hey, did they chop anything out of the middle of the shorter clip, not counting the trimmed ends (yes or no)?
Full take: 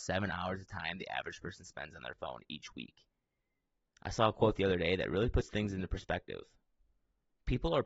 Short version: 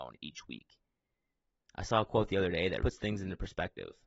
yes